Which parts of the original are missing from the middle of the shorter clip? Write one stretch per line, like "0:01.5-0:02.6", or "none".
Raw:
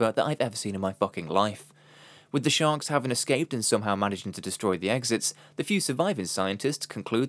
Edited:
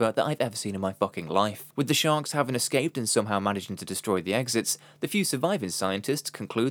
0:01.7-0:02.3